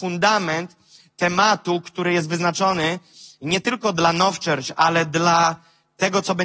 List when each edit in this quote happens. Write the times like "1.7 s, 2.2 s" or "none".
none